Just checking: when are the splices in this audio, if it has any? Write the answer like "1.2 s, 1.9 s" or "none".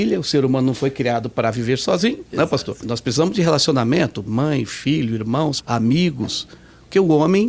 2.8 s, 4.3 s, 5.6 s